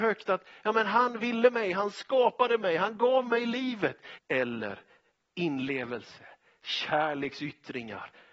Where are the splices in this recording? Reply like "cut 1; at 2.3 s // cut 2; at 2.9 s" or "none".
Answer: cut 1; at 4.2 s